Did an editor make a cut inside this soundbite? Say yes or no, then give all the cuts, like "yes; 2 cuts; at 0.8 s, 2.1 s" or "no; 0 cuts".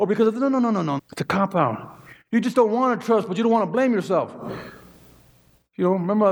yes; 1 cut; at 1.0 s